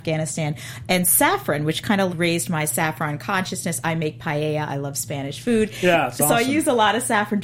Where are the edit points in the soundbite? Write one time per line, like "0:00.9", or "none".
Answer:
0:02.1